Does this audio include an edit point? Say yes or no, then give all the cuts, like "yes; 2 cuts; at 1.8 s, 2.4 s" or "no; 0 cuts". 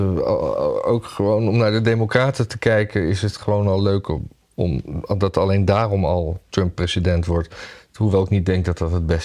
no; 0 cuts